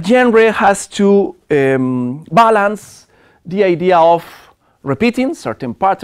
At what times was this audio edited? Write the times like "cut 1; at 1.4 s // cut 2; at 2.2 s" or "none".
none